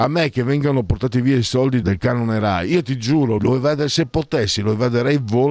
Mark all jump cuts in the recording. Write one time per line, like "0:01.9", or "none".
0:01.8
0:03.4